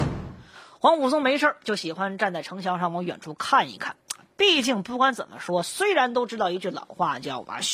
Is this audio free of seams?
yes; 0 cuts

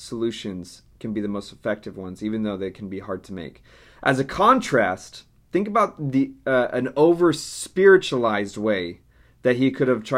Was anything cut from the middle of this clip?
no; 0 cuts

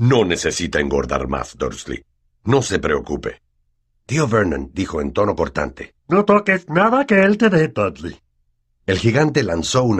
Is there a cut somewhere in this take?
yes; 2 cuts; at 3.9 s, 6.0 s

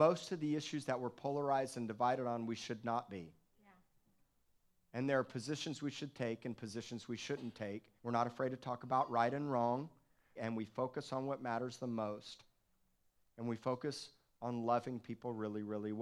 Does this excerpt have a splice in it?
yes; 2 cuts; at 8.0 s, 10.4 s

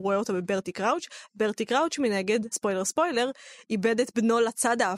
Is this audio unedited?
no; 1 cut; at 2.5 s

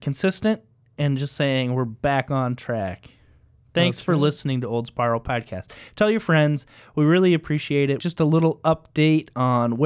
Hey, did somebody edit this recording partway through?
yes; 1 cut; at 8.0 s

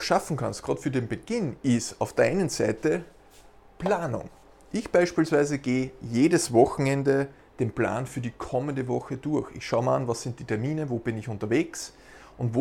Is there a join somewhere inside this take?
no; 0 cuts

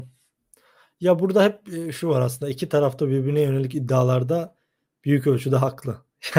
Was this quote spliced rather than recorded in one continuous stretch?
no; 0 cuts

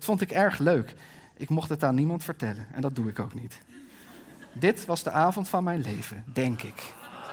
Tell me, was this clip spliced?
no; 0 cuts

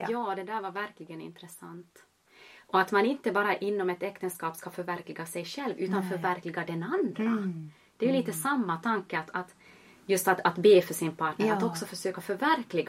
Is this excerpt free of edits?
yes; 0 cuts

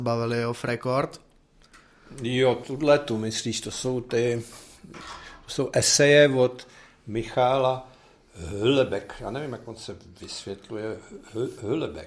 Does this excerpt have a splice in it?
no; 0 cuts

